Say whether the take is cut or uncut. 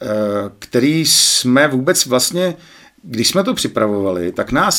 uncut